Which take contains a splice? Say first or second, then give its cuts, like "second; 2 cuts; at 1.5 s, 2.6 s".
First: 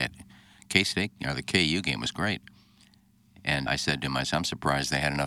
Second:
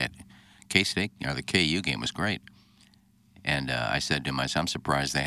first; 1 cut; at 3.7 s